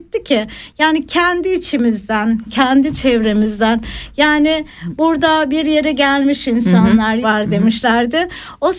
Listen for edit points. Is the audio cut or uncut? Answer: cut